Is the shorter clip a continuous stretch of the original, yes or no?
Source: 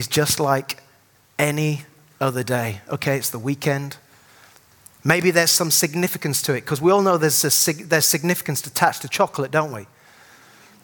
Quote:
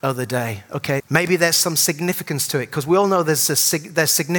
no